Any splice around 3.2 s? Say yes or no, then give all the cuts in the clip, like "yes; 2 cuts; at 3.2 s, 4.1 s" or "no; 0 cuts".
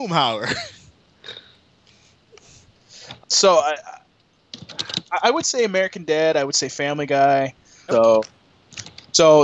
yes; 2 cuts; at 3.2 s, 7.9 s